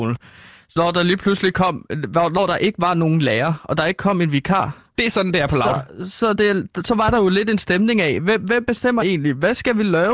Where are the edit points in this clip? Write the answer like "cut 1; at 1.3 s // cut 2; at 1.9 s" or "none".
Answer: none